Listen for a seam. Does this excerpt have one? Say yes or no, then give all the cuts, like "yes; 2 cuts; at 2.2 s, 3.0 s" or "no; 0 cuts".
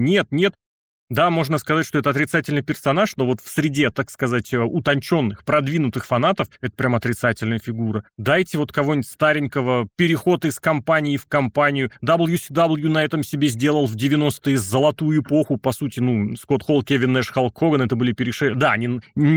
no; 0 cuts